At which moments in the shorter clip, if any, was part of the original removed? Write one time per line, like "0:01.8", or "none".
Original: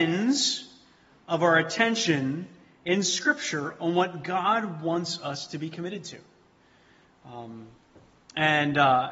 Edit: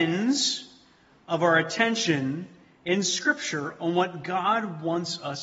none